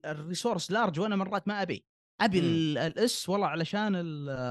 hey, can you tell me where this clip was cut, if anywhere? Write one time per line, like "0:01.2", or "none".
none